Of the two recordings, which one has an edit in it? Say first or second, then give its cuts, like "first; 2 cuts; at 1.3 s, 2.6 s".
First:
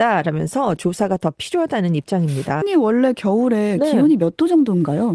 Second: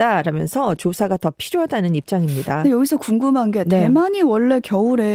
first; 1 cut; at 2.6 s